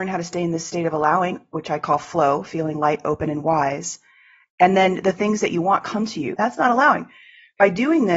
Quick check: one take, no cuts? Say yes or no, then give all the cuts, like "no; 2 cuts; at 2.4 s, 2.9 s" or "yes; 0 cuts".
no; 1 cut; at 6.4 s